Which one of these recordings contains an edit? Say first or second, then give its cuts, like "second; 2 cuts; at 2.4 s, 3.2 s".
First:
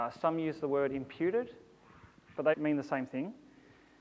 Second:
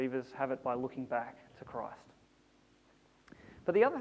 first; 1 cut; at 2.5 s